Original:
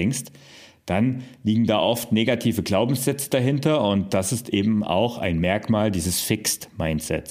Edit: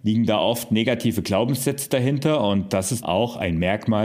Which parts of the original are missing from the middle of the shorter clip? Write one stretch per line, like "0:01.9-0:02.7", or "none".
0:04.4-0:04.8

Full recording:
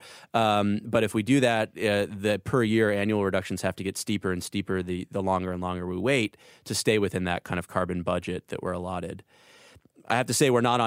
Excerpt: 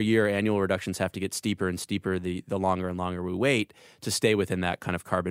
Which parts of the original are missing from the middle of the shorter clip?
none

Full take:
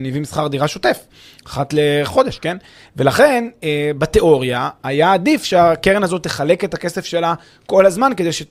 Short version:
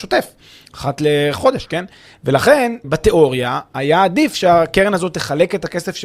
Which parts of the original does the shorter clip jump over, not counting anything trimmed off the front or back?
0:03.6-0:03.9

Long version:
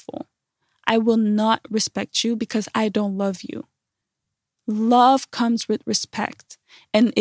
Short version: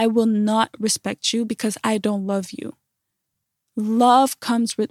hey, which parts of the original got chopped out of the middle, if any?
none

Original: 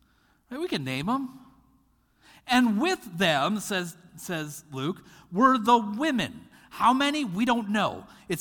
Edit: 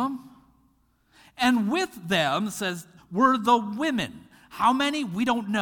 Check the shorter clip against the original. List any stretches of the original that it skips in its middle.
0:04.1-0:05.2

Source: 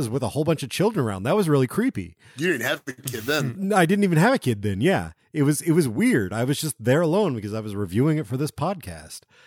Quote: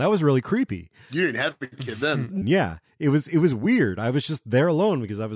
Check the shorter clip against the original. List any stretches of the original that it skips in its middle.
0:03.7-0:04.7

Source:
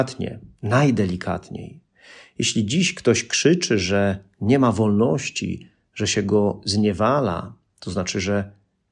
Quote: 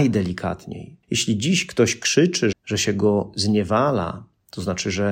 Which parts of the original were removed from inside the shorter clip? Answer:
0:01.9-0:02.3
0:03.8-0:05.8

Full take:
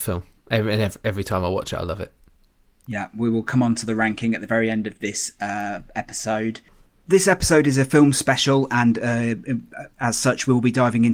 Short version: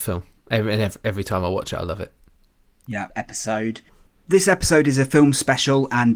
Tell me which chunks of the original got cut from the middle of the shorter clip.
0:03.1-0:05.9

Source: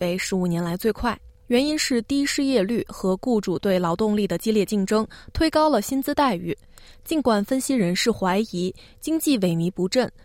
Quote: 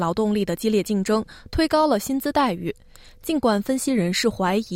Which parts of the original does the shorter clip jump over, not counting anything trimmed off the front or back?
none

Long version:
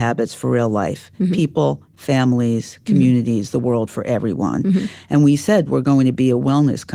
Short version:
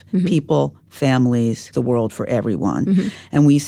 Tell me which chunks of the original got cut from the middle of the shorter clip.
0:02.8-0:03.5

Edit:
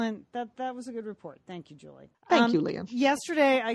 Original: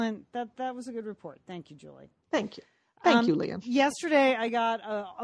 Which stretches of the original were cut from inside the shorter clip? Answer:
0:02.1-0:02.9

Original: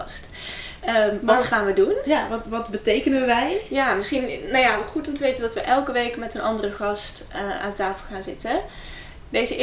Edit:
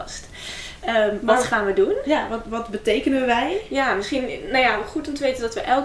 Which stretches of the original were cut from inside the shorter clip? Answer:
none

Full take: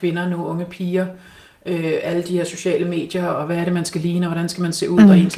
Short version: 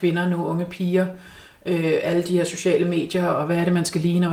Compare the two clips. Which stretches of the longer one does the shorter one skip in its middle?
none

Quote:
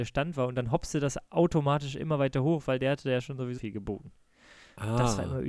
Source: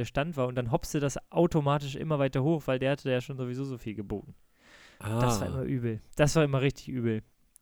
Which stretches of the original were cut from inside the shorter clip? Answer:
0:03.6-0:03.8

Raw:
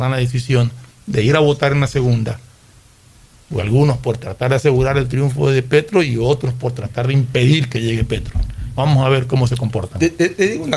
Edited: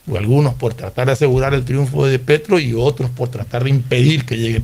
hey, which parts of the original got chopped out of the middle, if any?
none

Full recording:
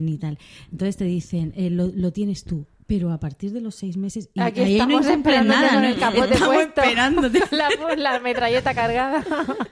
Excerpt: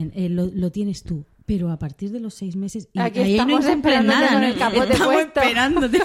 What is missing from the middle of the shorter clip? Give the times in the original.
none

